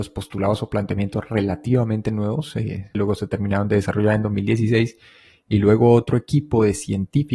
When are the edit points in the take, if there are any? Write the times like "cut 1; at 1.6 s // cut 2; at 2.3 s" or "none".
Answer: cut 1; at 2.9 s